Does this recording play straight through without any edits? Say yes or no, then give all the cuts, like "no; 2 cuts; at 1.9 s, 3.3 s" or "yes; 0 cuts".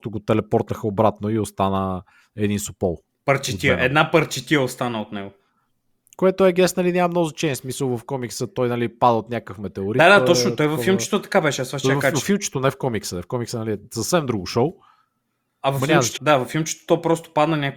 no; 1 cut; at 16.2 s